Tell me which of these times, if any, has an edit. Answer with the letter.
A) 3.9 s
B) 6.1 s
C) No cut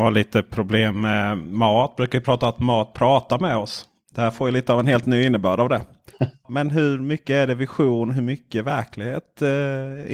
B